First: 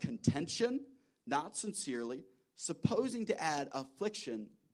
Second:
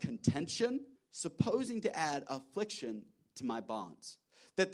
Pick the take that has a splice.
second; 1 cut; at 1.0 s

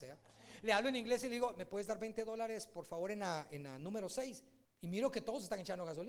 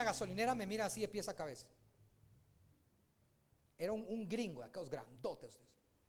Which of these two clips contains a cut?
first; 1 cut; at 4.6 s

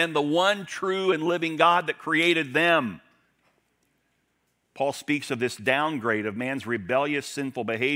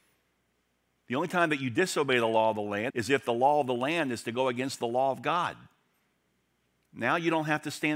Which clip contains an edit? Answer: second; 1 cut; at 2.9 s

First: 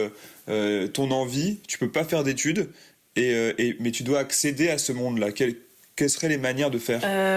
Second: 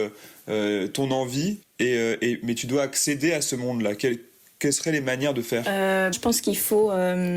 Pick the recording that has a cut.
second; 2 cuts; at 1.6 s, 6.1 s

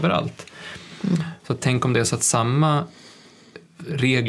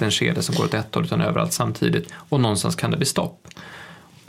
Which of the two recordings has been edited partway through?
first; 1 cut; at 1.4 s

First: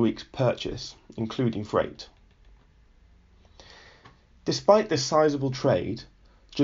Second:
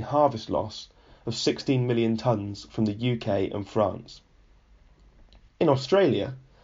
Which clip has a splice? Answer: second; 1 cut; at 5.5 s

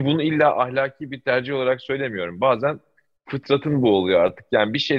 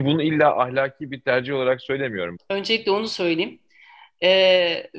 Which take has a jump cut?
second; 1 cut; at 2.4 s

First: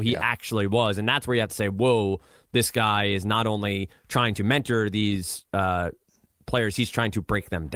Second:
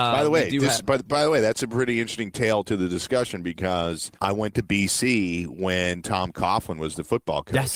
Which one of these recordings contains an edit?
second; 1 cut; at 4.1 s

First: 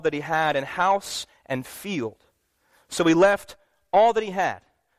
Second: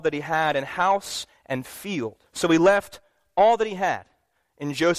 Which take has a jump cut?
second; 1 cut; at 2.3 s

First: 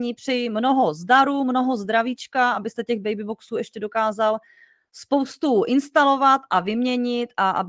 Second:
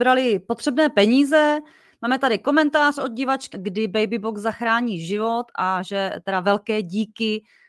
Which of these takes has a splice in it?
second; 1 cut; at 3.5 s

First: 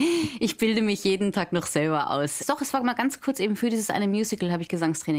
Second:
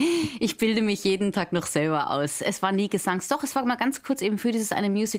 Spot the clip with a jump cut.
first; 1 cut; at 2.4 s

